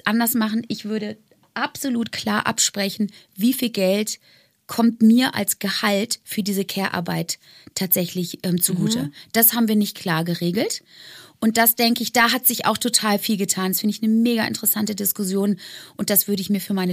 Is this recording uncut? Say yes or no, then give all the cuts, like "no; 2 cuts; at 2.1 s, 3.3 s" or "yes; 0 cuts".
yes; 0 cuts